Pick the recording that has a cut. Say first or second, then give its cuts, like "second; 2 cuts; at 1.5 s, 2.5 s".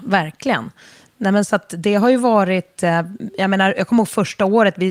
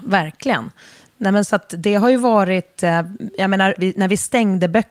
second; 1 cut; at 3.7 s